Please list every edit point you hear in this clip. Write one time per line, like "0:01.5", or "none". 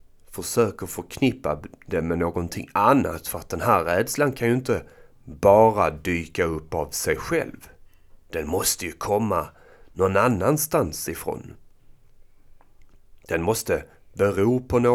none